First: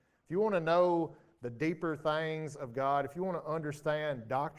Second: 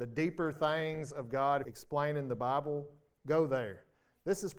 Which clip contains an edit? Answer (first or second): second